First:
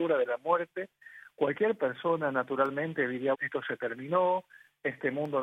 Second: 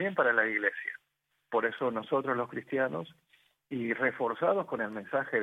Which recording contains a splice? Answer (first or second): first